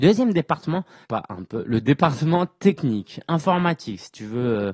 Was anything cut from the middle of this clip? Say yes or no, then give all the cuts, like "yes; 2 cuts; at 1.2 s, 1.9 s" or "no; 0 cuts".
yes; 1 cut; at 1.0 s